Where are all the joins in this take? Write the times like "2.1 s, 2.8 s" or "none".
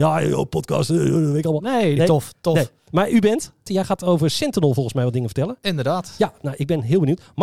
2.0 s, 3.7 s